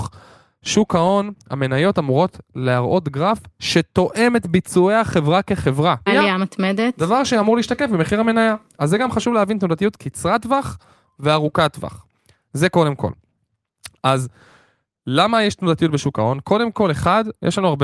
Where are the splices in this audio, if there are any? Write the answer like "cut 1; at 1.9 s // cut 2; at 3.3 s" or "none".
cut 1; at 6.1 s